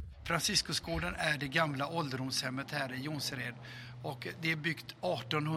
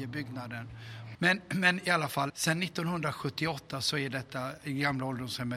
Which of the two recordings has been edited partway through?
second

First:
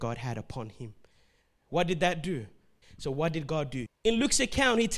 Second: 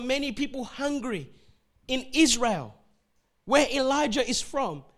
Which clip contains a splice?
first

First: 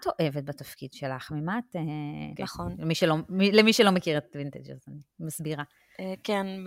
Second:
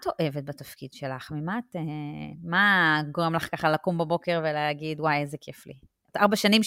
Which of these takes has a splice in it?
first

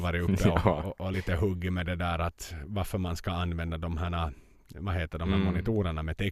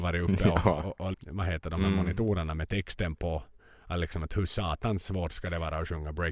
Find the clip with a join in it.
second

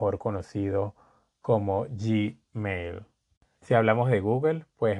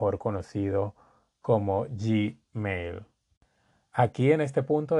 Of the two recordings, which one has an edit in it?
first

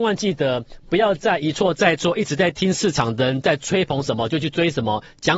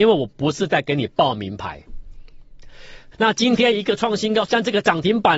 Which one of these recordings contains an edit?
second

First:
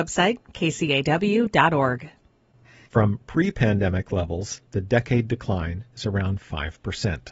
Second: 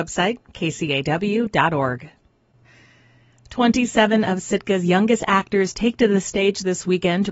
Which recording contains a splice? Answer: first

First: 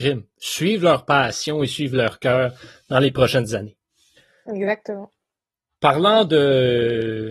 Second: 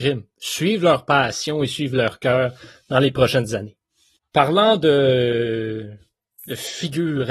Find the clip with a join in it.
second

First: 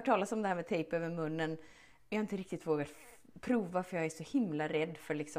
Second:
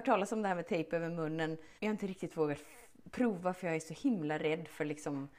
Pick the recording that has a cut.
second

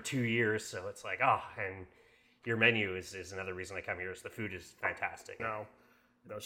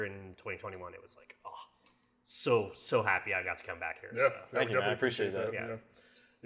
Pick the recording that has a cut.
first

